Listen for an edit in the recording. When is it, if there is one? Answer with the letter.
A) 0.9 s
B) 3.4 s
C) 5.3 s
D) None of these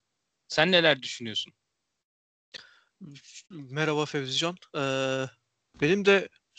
B